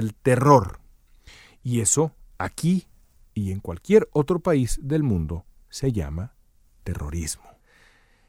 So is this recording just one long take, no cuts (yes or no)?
yes